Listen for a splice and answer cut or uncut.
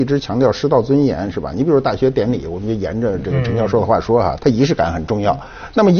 cut